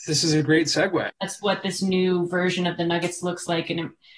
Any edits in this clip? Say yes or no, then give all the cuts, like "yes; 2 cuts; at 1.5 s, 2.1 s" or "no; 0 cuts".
yes; 1 cut; at 1.1 s